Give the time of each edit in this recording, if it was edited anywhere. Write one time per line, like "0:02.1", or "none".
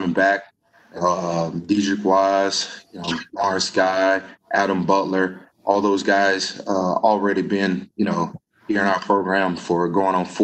none